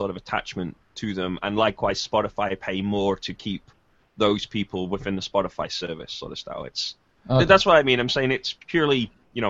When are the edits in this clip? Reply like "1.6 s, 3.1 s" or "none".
none